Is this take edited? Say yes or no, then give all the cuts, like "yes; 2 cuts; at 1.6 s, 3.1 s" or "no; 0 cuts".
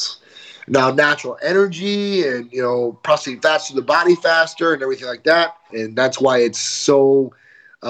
yes; 1 cut; at 5.7 s